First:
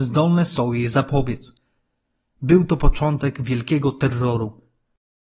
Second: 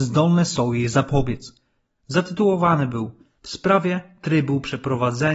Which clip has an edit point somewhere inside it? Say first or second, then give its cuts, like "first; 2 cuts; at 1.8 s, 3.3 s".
second; 1 cut; at 1.9 s